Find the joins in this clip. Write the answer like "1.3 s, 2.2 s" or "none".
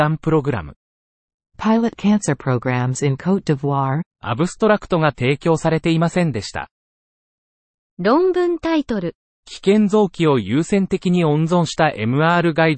4.1 s